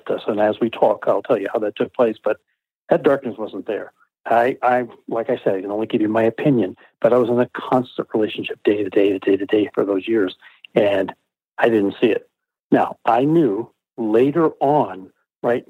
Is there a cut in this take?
no; 0 cuts

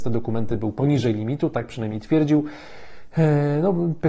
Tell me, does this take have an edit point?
no; 0 cuts

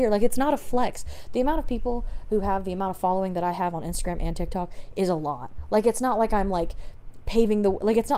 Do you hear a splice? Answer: no; 0 cuts

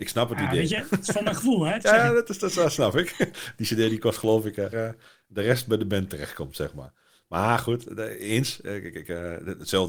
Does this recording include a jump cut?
yes; 1 cut; at 4.7 s

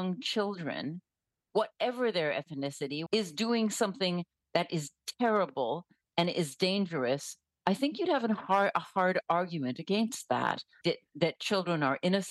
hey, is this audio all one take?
no; 2 cuts; at 3.1 s, 10.8 s

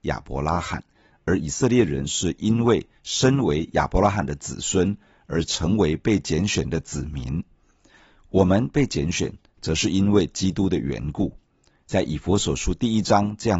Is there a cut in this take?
no; 0 cuts

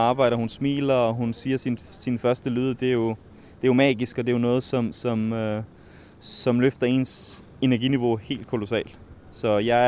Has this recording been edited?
no; 0 cuts

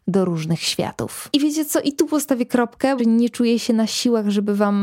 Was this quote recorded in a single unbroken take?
no; 2 cuts; at 1.3 s, 3.0 s

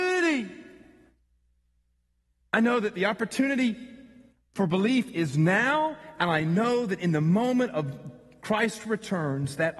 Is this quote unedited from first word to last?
no; 1 cut; at 2.4 s

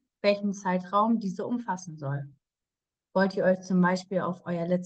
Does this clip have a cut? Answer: no; 0 cuts

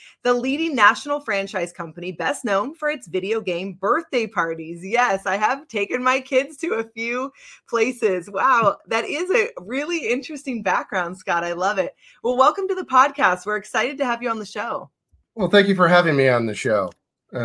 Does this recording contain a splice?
no; 0 cuts

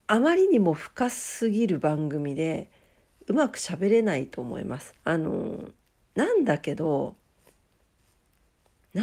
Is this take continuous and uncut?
no; 1 cut; at 5.0 s

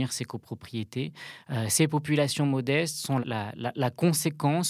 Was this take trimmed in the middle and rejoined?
yes; 1 cut; at 3.2 s

